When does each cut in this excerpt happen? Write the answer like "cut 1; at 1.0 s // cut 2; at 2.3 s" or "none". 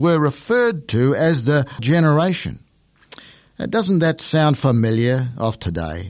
cut 1; at 1.8 s